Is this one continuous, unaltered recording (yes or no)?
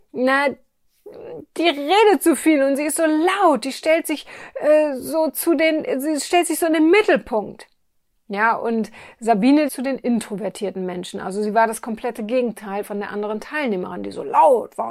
no